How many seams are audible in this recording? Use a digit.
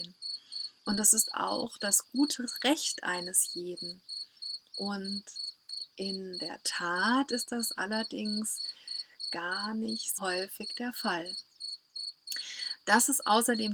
2